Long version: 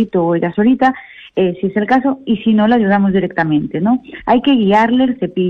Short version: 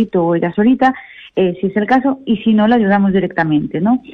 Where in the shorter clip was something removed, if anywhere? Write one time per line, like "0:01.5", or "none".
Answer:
none